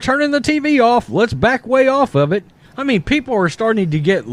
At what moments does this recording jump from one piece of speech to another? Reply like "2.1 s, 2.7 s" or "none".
2.6 s